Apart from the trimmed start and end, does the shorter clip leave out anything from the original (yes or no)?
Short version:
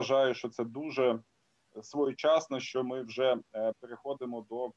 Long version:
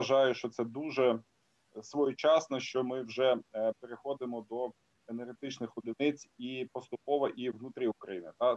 no